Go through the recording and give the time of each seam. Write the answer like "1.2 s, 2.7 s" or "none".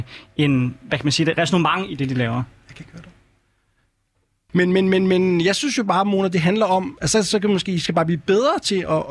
4.5 s